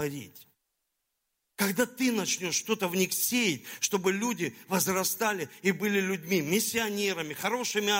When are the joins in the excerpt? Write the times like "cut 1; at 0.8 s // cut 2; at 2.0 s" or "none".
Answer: none